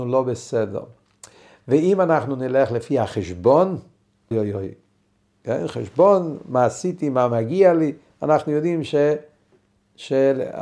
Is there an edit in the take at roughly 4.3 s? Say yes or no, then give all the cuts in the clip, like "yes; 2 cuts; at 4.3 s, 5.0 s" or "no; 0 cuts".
yes; 1 cut; at 4.3 s